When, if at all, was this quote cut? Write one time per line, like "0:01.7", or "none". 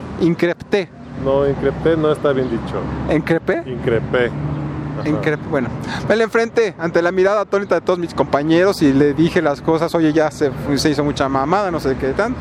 none